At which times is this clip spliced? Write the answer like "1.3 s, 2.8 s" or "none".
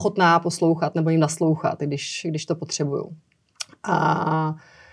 none

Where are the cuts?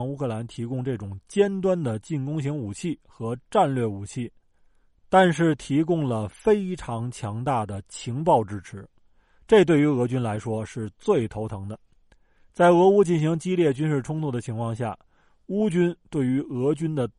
none

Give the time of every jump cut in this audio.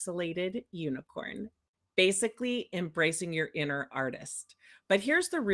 none

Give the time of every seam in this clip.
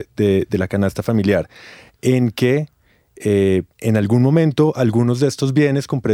1.9 s, 3.7 s

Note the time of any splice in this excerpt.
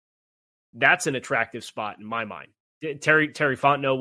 2.7 s

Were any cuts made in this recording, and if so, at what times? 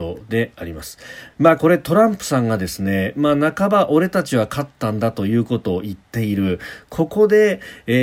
1.3 s

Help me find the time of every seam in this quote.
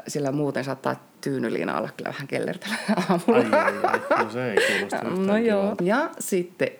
5.8 s

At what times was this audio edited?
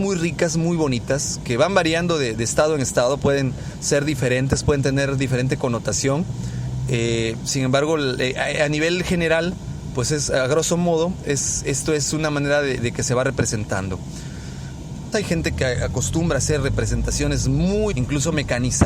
15.1 s, 17.9 s

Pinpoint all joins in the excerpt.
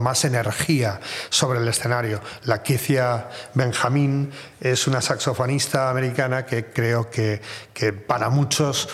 none

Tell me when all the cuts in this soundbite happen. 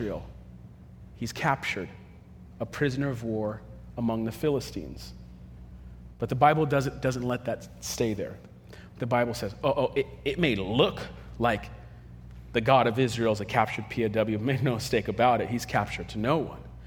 none

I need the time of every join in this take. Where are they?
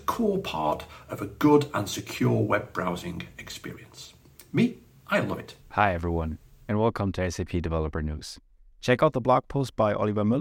5.6 s, 8.7 s

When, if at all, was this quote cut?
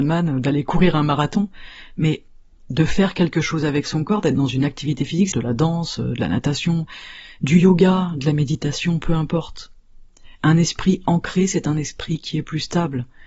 5.3 s

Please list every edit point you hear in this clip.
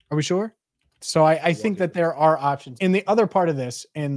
1.0 s, 2.8 s

